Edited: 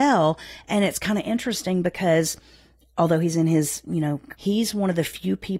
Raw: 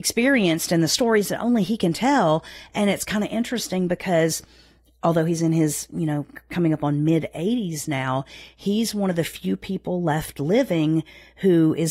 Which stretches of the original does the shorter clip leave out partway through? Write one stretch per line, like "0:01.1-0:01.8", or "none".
0:06.4-0:08.6